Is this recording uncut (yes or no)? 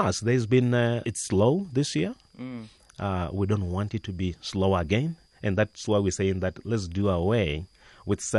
no